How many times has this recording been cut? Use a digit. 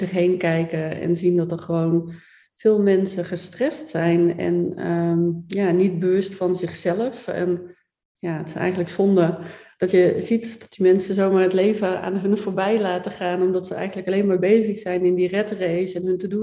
0